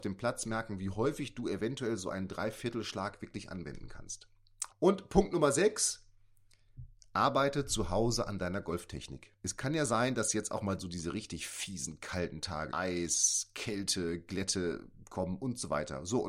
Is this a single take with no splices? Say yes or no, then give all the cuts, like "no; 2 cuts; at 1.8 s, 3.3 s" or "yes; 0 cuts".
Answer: no; 3 cuts; at 4.7 s, 9.4 s, 12.7 s